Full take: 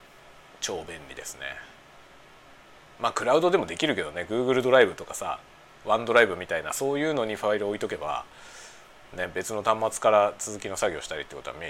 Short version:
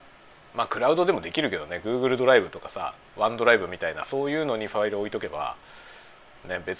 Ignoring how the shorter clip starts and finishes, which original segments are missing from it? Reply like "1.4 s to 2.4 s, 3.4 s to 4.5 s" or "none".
5.5 s to 5.7 s